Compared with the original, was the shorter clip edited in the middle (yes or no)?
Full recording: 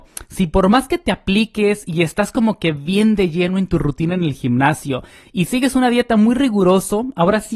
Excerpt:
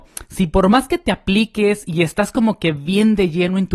no